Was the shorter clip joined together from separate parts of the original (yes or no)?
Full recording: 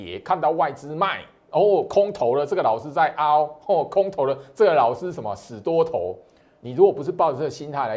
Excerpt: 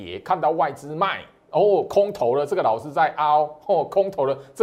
no